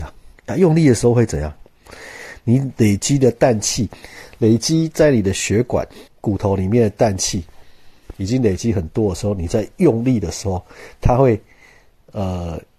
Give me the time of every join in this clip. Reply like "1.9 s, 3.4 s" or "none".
6.1 s